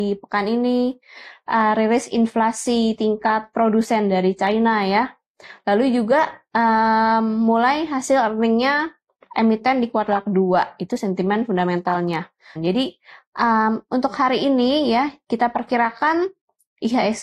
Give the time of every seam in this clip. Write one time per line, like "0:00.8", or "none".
0:01.3
0:12.6